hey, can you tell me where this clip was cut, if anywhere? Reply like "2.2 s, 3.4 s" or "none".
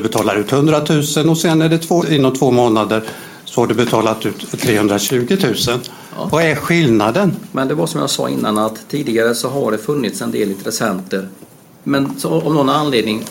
2.0 s, 11.7 s